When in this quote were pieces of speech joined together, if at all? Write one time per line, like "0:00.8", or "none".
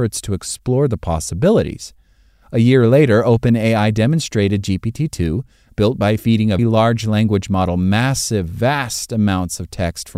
0:06.6